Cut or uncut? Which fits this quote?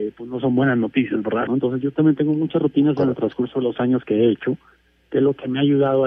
cut